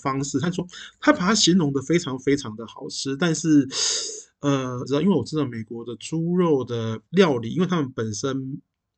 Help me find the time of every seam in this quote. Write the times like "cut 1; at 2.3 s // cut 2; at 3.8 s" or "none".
cut 1; at 4.9 s // cut 2; at 7.1 s